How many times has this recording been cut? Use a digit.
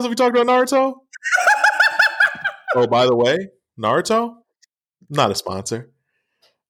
0